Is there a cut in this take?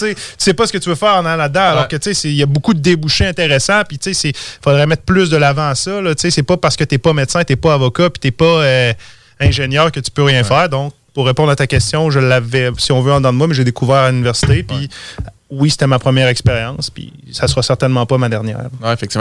no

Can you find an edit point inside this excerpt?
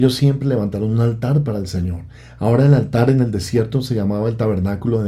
no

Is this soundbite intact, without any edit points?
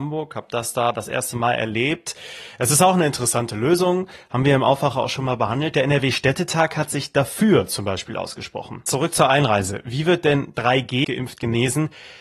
no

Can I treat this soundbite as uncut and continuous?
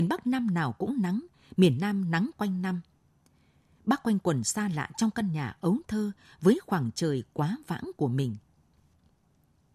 yes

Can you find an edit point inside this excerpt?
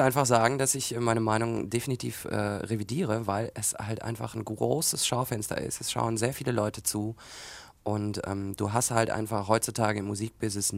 no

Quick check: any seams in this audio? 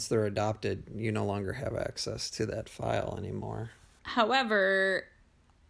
yes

